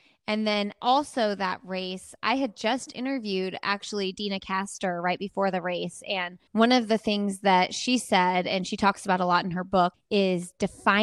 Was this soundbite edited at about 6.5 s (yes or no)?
yes